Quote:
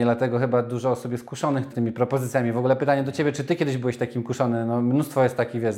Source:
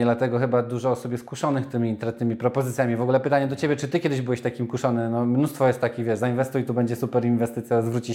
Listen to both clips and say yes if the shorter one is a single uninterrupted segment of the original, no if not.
no